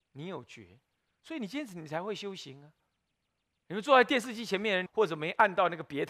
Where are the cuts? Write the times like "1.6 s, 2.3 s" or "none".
4.9 s

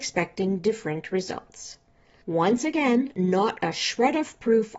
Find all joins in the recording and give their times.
none

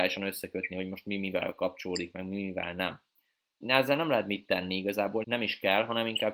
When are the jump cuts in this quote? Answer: 3.6 s, 5.2 s

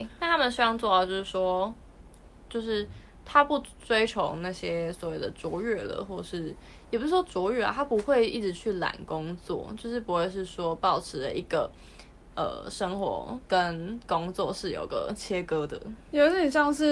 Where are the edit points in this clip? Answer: 12.3 s

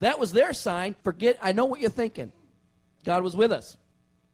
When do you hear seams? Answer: 1.0 s, 2.9 s

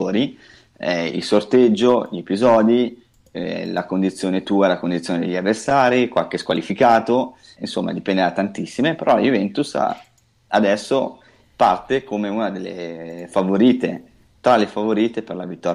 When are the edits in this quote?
7.6 s

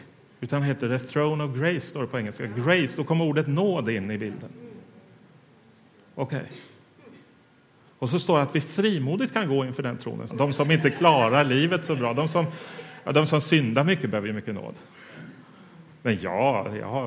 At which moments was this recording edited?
10.3 s

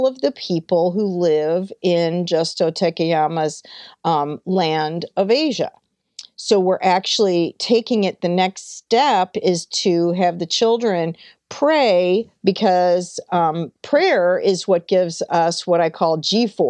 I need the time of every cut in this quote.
none

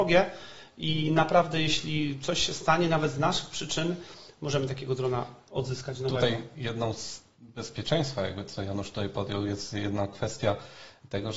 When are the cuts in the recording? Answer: none

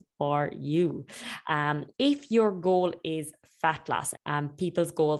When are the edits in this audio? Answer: 1.9 s, 4.1 s

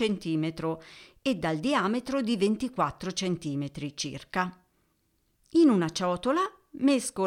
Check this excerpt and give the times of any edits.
5.4 s

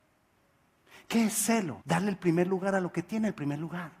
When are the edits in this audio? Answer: 1.8 s

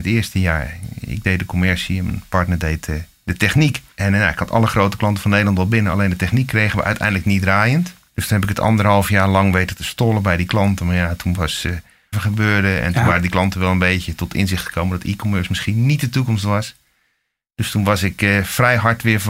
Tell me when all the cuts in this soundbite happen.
12.1 s

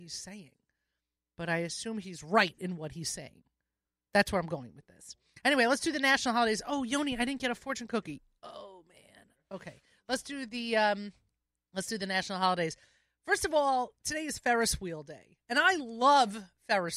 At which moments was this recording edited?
none

